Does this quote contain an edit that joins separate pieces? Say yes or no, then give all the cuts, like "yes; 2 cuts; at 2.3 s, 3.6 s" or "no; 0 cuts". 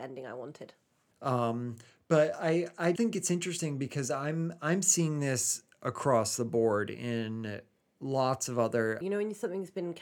yes; 3 cuts; at 1.1 s, 3.0 s, 9.0 s